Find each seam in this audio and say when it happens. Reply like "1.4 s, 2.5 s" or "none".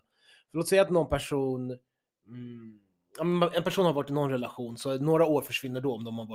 none